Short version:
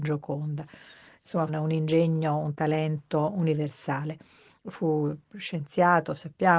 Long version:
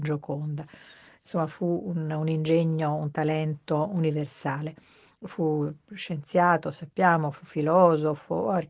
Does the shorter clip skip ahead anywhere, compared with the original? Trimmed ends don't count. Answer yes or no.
yes